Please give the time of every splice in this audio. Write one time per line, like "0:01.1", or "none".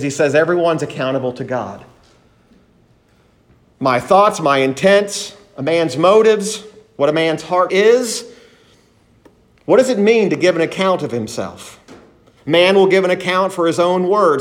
0:07.7
0:12.4